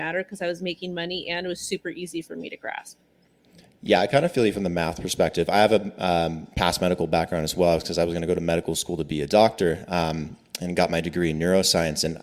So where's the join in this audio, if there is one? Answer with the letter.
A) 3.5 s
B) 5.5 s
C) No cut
C